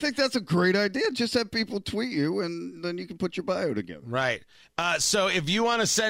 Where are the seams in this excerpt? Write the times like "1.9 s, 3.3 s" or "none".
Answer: none